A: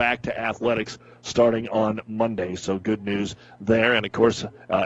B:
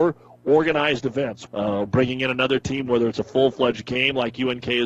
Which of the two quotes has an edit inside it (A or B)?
B